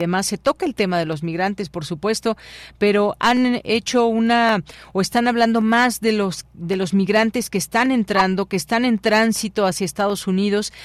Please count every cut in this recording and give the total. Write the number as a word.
zero